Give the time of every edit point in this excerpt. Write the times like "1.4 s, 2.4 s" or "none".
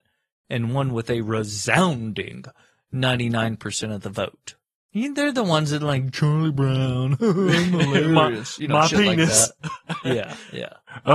4.8 s